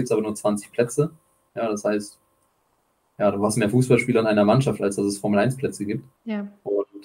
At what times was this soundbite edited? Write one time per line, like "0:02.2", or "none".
0:06.1